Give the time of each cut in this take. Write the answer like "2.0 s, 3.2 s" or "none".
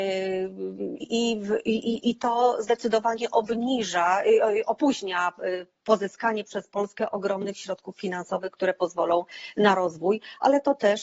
1.0 s